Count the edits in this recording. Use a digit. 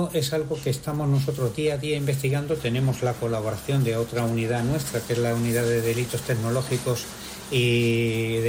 0